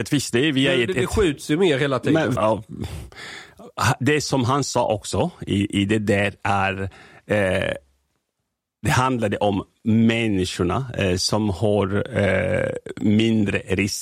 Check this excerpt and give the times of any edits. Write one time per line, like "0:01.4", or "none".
0:02.3